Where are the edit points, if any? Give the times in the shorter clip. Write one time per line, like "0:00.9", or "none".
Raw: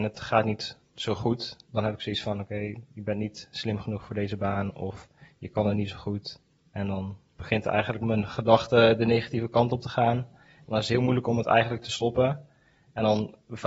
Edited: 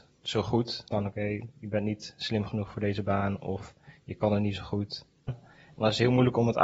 0:00.9
0:05.3